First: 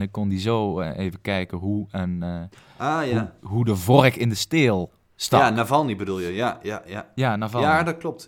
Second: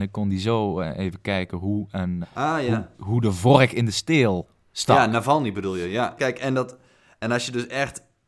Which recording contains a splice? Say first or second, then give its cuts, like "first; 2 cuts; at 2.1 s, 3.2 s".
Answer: second; 2 cuts; at 2.2 s, 6.2 s